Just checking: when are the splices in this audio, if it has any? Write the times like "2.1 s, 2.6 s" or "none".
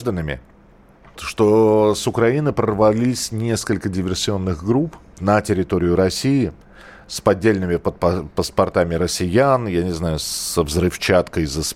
1.2 s, 5.2 s